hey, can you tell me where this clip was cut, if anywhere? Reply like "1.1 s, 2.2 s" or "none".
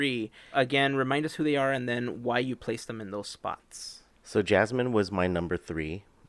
none